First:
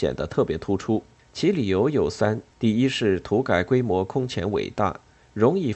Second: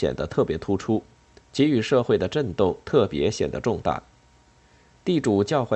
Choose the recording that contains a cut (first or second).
first